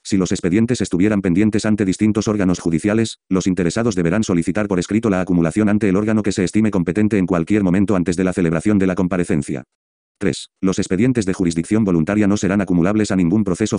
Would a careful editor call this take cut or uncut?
cut